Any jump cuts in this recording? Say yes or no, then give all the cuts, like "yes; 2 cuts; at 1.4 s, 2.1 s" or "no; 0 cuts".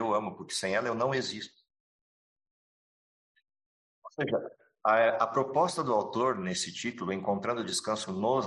no; 0 cuts